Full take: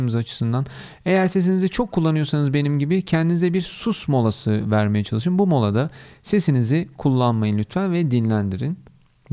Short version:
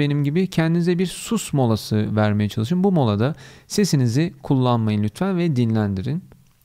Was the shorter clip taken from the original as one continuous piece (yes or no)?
yes